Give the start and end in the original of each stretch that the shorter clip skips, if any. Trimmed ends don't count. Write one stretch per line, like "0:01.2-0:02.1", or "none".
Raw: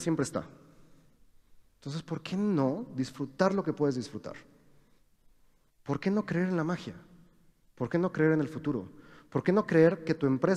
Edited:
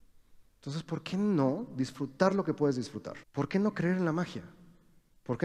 0:04.4-0:05.7